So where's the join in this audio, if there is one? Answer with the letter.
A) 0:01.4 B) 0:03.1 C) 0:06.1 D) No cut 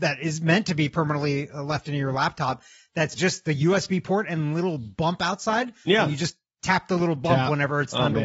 B